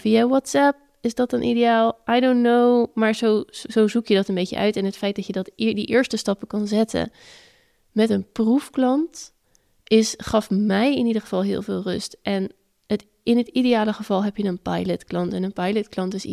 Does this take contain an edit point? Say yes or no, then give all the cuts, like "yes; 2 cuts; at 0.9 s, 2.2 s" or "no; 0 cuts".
no; 0 cuts